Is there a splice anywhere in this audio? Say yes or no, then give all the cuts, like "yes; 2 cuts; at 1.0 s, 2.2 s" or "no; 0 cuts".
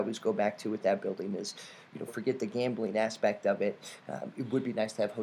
yes; 1 cut; at 2.1 s